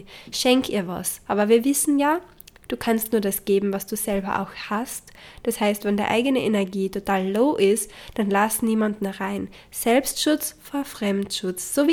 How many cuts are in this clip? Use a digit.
0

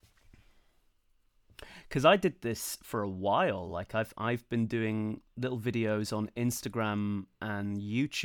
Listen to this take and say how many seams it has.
0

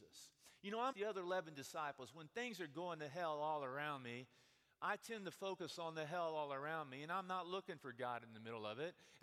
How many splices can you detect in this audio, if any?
1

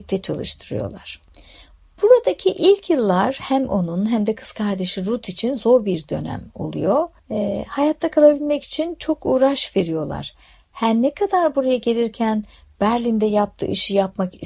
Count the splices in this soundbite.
0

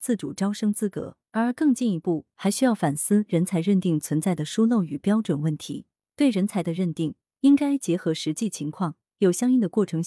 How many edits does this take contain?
1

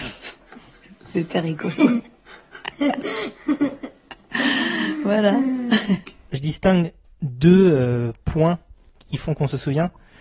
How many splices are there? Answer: 0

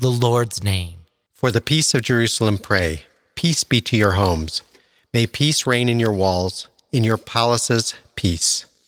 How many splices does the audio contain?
1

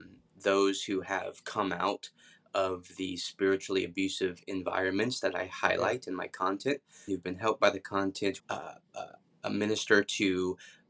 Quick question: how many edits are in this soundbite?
2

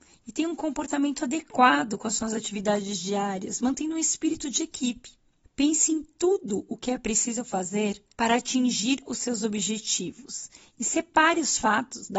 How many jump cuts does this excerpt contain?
2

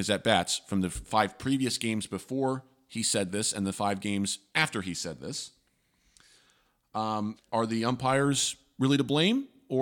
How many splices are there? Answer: 1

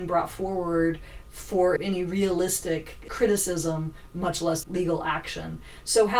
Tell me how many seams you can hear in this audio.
3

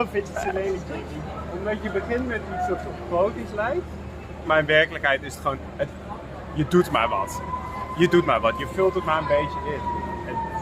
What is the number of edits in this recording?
1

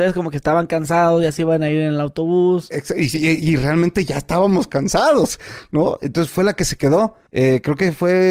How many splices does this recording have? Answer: 1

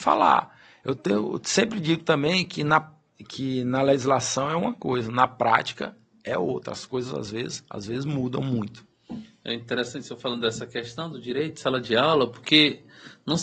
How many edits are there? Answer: 0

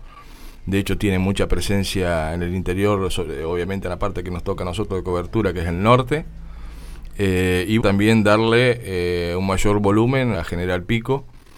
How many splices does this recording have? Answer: 2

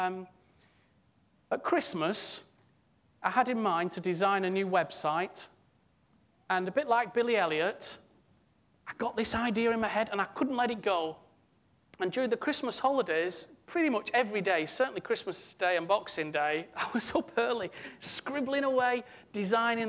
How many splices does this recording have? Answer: 0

